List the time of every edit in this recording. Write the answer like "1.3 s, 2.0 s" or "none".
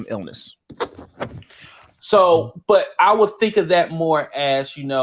2.0 s